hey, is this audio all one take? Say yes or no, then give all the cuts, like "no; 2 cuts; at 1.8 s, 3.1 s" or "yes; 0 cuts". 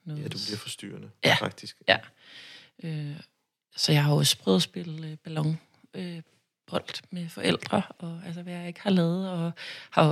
yes; 0 cuts